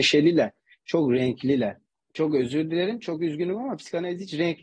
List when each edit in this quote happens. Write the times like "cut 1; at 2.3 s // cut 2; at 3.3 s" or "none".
none